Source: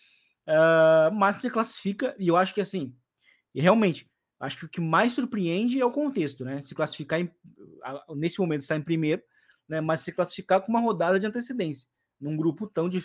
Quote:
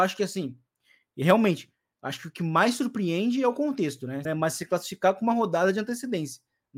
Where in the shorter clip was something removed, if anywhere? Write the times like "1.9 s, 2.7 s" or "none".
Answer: 4.3 s